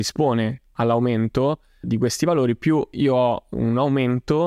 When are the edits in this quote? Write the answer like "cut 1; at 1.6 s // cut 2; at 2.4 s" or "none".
cut 1; at 1.8 s